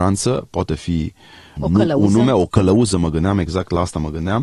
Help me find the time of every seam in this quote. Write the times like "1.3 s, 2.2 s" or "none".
none